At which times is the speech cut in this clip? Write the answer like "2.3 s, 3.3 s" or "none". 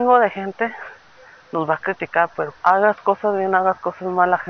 2.5 s